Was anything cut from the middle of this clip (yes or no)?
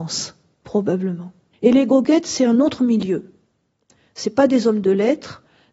yes